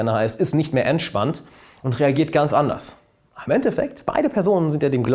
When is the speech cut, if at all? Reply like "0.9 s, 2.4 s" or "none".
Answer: none